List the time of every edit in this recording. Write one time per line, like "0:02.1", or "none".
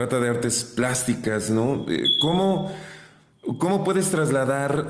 none